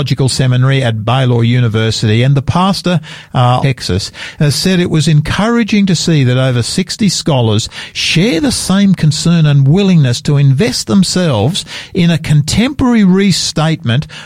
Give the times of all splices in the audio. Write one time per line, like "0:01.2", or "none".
0:03.6